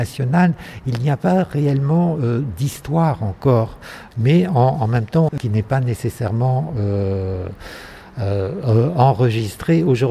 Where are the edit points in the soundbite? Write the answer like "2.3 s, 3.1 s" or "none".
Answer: 4.1 s, 5.3 s